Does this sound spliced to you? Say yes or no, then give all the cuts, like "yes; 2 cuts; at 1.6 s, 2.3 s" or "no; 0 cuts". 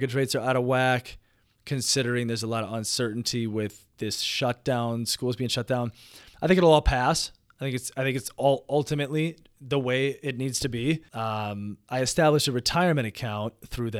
yes; 1 cut; at 11.1 s